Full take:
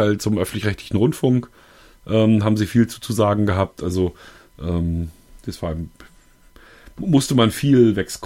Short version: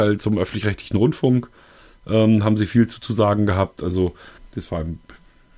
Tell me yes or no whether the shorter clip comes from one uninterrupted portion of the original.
no